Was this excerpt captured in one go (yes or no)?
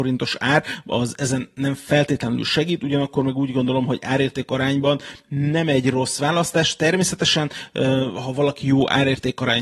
yes